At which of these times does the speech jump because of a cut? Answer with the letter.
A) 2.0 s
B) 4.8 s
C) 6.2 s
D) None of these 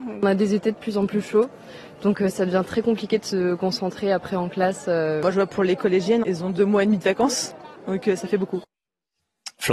C